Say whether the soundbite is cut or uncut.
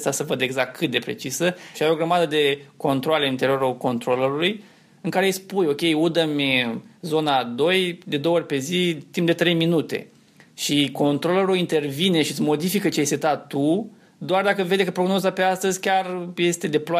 cut